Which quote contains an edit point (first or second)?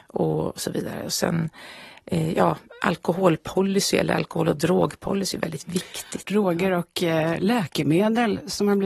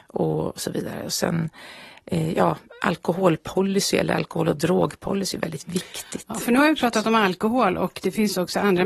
first